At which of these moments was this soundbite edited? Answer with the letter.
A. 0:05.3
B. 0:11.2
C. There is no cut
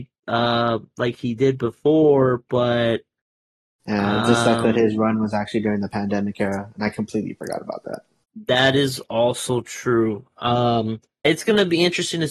B